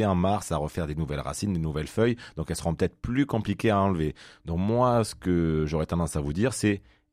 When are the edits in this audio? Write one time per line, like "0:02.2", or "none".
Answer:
none